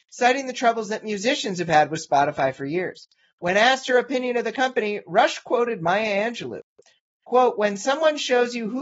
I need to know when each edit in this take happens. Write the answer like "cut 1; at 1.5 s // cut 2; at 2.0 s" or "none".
none